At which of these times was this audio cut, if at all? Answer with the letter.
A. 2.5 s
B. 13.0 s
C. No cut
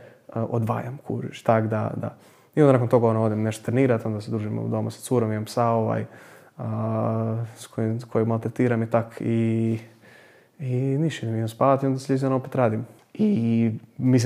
B